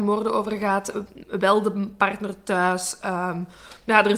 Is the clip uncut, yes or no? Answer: yes